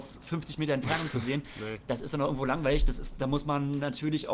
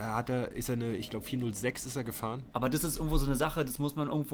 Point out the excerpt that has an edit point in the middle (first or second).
second